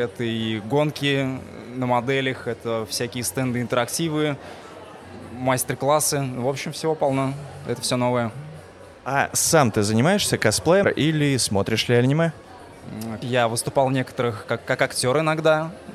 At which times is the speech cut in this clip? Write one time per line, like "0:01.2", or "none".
0:10.8
0:13.2